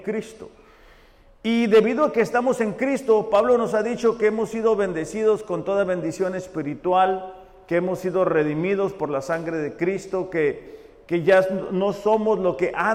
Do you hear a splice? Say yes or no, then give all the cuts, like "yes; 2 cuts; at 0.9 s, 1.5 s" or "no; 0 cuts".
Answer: no; 0 cuts